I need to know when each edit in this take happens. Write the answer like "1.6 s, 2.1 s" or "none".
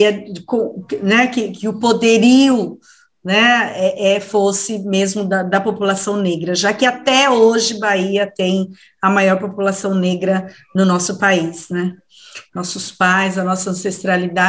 12.5 s